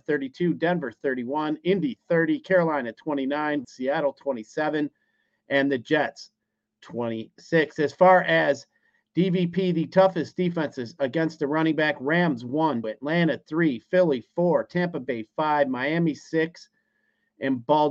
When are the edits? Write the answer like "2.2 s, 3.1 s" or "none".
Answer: 3.6 s, 12.8 s